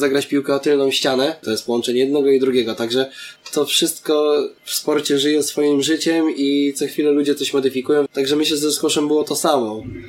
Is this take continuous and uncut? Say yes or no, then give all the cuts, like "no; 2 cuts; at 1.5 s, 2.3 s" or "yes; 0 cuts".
no; 2 cuts; at 1.4 s, 8.1 s